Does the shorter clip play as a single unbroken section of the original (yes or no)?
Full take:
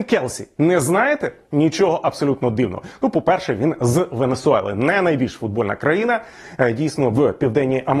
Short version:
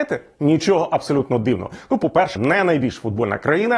no